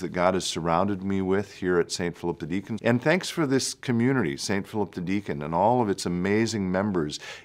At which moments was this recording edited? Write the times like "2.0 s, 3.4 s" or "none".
2.8 s